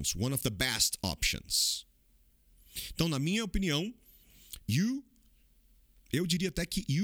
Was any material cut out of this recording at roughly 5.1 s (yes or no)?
no